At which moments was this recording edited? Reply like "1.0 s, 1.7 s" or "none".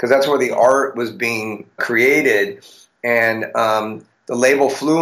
1.8 s